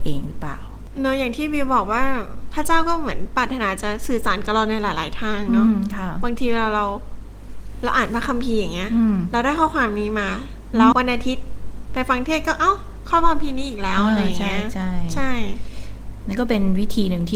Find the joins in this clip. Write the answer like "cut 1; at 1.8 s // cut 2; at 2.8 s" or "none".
cut 1; at 10.9 s